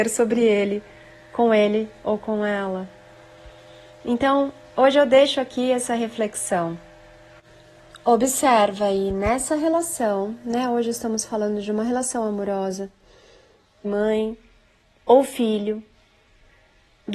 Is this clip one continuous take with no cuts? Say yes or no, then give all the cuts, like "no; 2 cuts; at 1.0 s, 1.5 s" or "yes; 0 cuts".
no; 1 cut; at 13.8 s